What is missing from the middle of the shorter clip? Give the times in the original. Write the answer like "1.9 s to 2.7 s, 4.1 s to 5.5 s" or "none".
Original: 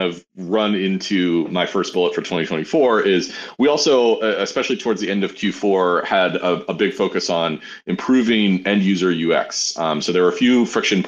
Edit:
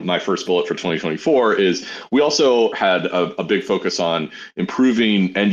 4.2 s to 6.0 s